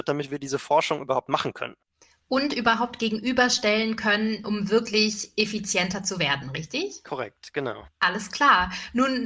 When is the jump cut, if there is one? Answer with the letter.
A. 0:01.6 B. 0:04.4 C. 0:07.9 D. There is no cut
B